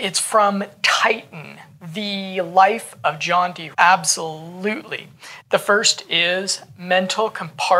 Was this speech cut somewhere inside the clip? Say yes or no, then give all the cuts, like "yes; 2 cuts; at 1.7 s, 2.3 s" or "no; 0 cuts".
yes; 2 cuts; at 3.7 s, 5.4 s